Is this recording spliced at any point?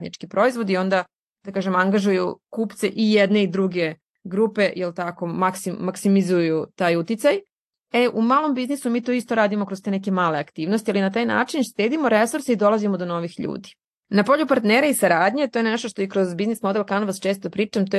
yes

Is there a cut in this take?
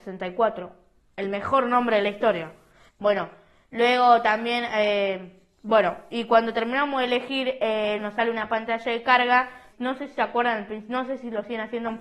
yes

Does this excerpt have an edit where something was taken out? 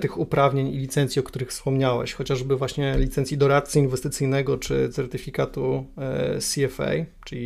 no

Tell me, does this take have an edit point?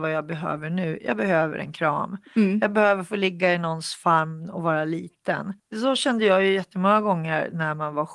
yes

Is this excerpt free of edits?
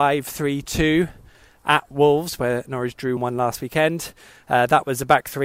no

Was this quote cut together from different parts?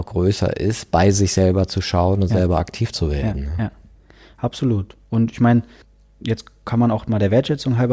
no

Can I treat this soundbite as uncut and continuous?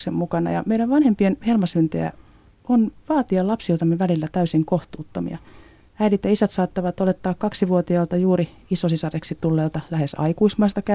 yes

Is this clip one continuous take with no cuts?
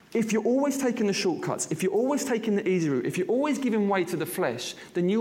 yes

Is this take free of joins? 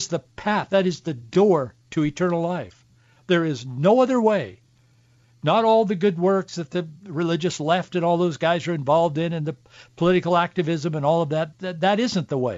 yes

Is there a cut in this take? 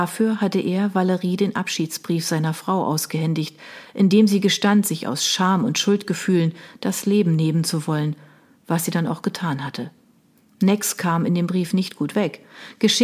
no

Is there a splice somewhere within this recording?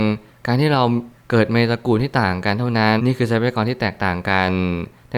yes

